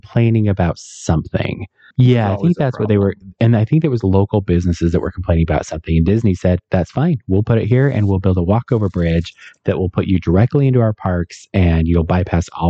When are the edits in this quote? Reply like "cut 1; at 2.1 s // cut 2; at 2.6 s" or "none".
cut 1; at 1.9 s